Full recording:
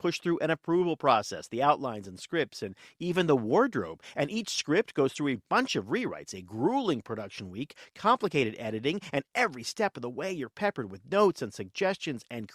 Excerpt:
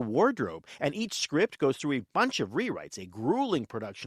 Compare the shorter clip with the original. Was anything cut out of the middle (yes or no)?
no